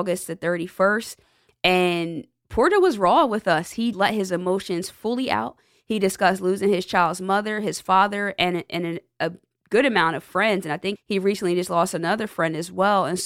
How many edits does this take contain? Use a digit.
2